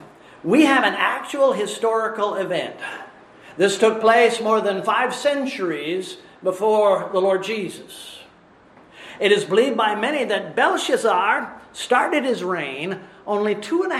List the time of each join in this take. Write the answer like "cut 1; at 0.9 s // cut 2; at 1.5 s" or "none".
none